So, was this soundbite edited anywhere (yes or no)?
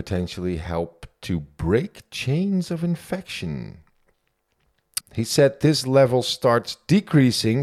yes